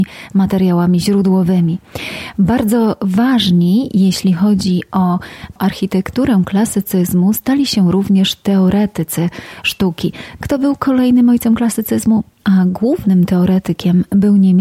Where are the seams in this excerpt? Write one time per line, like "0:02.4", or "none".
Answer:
0:10.4
0:12.3